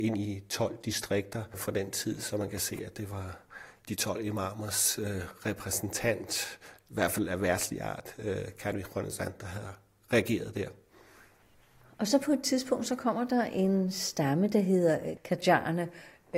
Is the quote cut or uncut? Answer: uncut